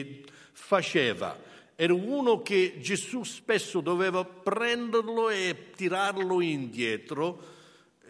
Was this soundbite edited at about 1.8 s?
no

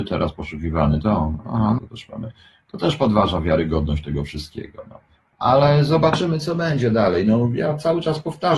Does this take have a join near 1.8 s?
yes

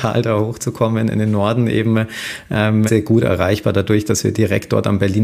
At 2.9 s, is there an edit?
yes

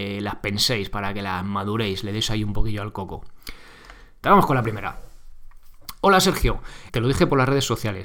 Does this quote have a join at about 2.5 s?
no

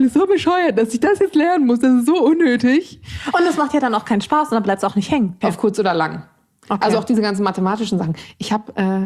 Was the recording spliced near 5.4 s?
yes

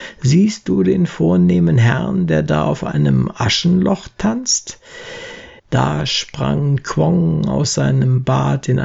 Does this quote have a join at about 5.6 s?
yes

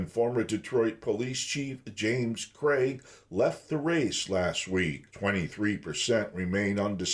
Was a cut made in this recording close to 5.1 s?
yes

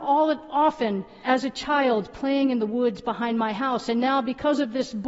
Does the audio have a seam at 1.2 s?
yes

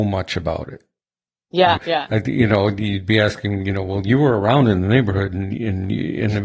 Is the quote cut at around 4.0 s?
no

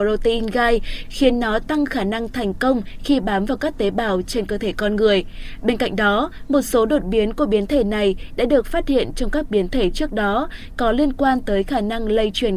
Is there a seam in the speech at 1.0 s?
yes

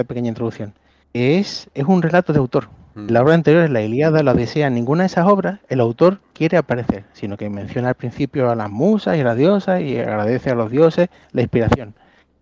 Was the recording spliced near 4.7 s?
no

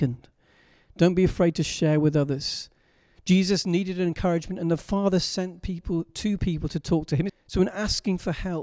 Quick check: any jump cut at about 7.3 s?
yes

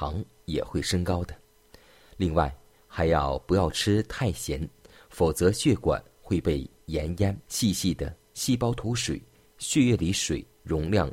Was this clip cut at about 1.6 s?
no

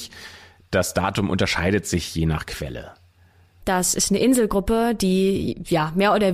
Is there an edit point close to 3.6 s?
yes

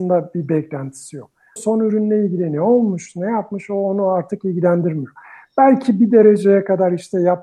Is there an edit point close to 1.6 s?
yes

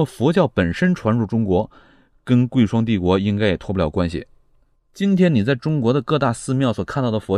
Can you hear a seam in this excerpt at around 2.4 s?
no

